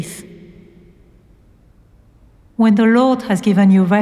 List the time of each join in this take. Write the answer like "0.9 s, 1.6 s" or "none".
2.4 s